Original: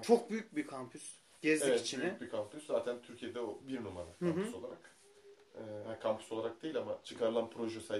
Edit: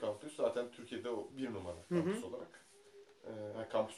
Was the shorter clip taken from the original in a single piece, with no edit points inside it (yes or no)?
yes